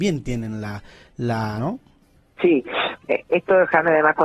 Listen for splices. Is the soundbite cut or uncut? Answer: cut